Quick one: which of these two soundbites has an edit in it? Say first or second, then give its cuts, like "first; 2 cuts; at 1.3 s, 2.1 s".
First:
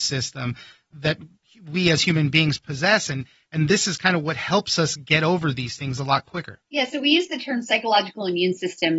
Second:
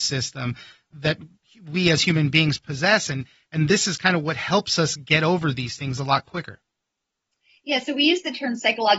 first; 1 cut; at 6.7 s